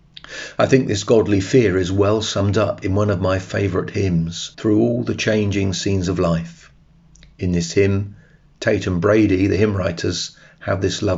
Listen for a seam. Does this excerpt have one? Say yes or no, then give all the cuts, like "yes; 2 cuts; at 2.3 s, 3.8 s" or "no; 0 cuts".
yes; 1 cut; at 4.5 s